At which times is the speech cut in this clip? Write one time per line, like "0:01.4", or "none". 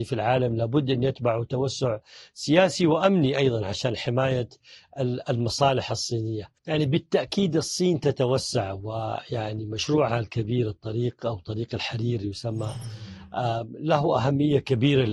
0:06.6

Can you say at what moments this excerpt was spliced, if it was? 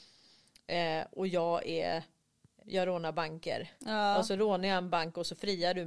0:02.6
0:03.8

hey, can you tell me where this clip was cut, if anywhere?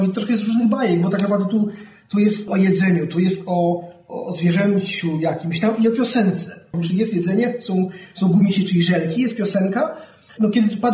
0:06.7

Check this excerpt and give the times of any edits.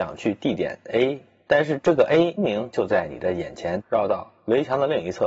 0:02.4
0:03.8

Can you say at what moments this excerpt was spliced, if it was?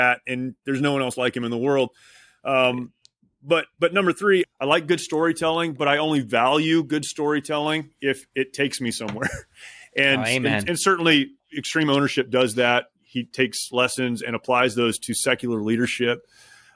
none

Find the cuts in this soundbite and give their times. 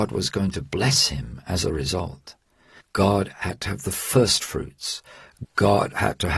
0:02.8
0:05.4

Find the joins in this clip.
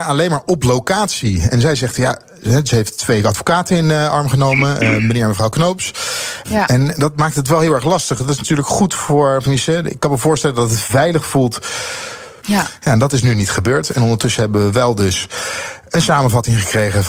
0:06.4
0:12.4

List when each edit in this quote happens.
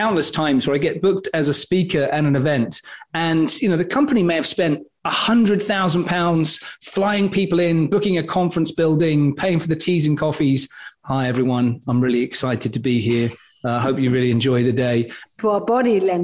0:11.0
0:15.3

